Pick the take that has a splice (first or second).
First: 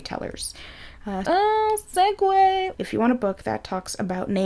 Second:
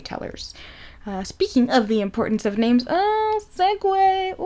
first